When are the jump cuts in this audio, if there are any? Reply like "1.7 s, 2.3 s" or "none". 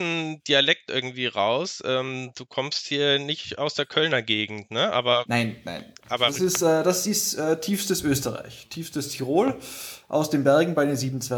none

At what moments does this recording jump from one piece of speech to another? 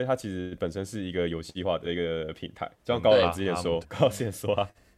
2.8 s, 3.8 s

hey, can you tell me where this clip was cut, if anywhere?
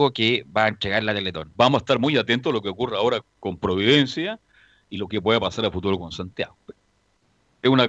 1.5 s, 3.2 s

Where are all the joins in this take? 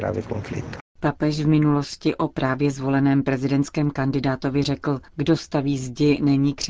5.1 s

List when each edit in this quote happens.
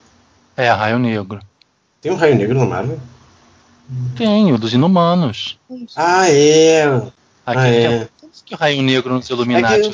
none

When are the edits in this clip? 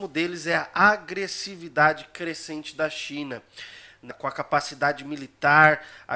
4.1 s

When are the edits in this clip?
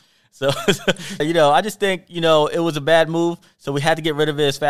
1.2 s

